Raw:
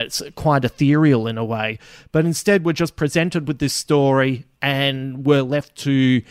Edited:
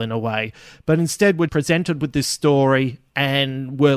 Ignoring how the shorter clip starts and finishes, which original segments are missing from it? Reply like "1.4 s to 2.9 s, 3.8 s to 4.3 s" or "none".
2.7 s to 2.9 s